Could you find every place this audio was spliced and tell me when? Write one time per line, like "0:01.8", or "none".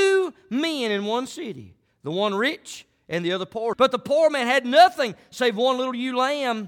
0:03.7